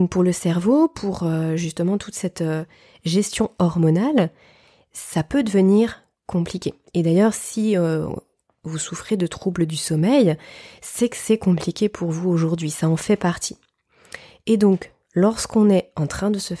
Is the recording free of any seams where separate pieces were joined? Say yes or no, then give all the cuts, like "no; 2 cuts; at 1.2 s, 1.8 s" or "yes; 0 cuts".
yes; 0 cuts